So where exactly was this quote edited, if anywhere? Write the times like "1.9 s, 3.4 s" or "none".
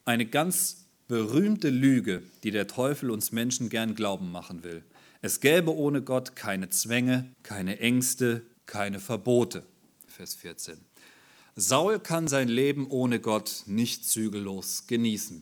7.3 s, 8.5 s, 10.1 s